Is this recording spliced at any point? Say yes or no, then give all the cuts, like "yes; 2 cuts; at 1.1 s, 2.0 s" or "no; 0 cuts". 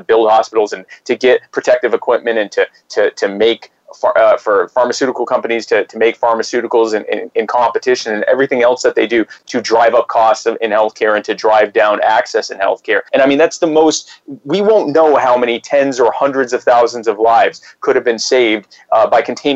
yes; 1 cut; at 13.1 s